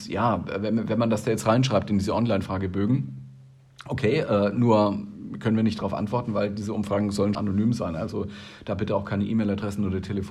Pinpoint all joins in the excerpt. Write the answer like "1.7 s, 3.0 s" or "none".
7.3 s